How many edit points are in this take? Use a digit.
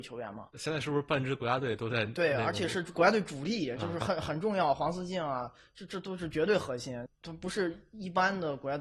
0